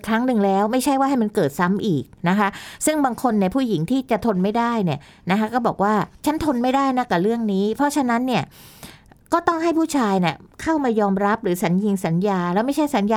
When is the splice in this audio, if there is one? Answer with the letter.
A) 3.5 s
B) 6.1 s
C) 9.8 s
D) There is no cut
B